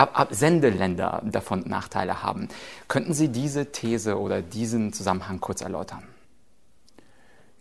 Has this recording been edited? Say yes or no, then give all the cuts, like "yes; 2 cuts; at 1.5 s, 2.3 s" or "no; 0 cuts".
no; 0 cuts